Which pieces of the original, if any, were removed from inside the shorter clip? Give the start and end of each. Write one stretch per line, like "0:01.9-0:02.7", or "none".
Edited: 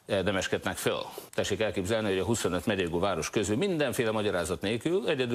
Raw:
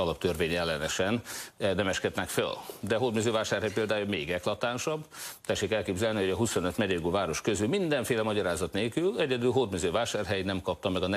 0:02.8-0:05.4